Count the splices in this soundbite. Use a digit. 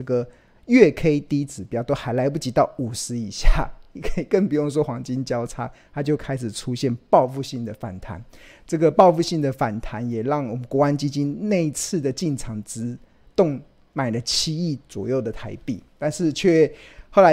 0